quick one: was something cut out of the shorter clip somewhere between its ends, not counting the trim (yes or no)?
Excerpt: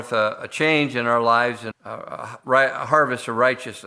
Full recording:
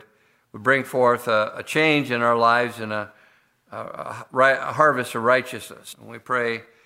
yes